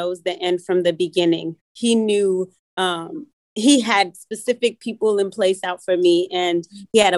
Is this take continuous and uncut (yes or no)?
no